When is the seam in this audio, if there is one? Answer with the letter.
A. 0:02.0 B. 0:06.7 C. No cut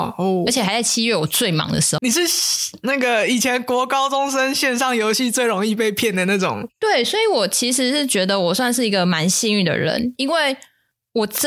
A